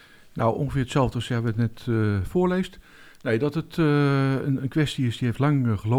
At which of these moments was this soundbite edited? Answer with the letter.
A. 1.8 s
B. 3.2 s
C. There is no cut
C